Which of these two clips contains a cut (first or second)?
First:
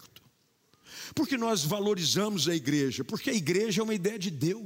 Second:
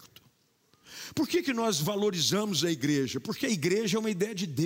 first